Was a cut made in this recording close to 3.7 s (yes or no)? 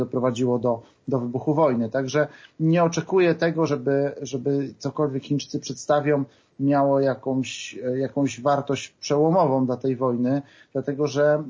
no